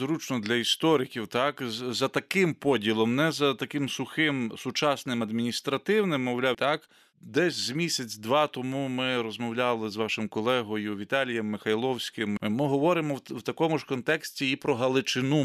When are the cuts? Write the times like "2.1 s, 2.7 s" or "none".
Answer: 6.5 s, 12.4 s